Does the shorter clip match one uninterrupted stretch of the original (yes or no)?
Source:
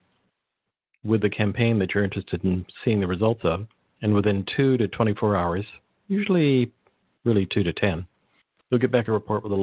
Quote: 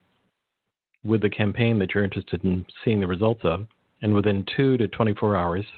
yes